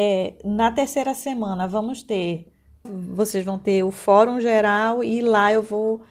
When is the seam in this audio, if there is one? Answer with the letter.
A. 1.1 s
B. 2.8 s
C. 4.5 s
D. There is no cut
B